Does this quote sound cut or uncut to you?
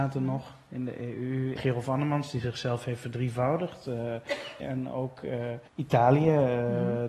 cut